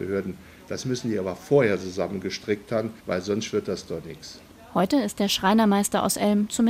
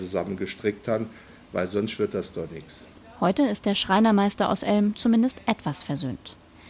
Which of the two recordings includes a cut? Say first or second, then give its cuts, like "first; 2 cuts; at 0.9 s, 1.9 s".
first; 1 cut; at 3.0 s